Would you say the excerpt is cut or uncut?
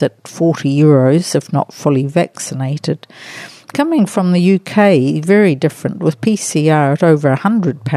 uncut